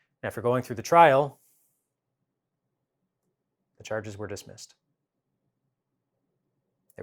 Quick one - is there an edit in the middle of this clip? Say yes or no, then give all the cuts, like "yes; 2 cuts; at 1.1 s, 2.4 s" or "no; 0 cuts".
no; 0 cuts